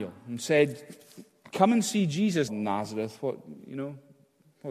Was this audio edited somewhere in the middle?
yes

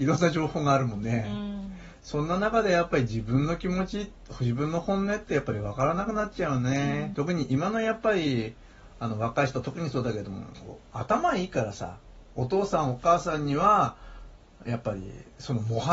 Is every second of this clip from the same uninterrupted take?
no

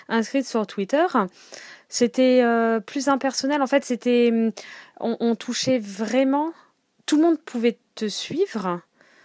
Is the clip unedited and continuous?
yes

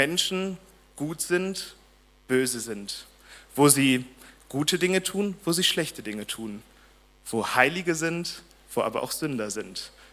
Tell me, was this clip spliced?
no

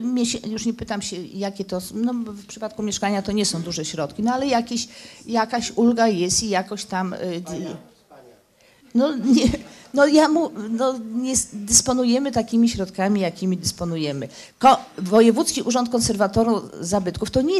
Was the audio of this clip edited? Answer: no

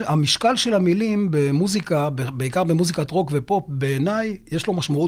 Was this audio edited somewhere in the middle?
no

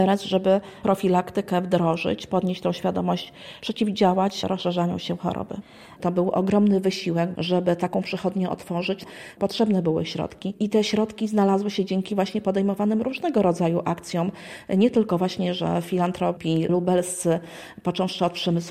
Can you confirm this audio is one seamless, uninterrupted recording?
no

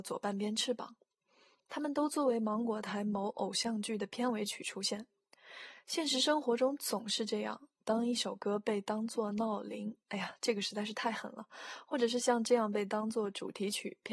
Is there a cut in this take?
no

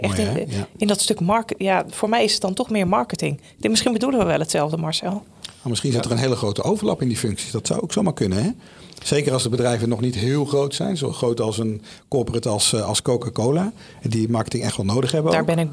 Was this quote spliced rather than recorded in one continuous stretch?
no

